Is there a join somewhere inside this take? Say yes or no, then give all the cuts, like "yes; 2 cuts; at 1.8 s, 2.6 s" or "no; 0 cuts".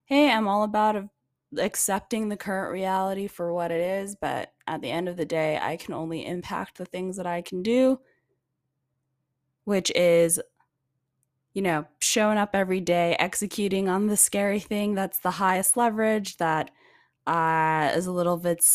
no; 0 cuts